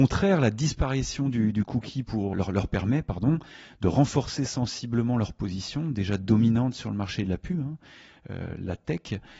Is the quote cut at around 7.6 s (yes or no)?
no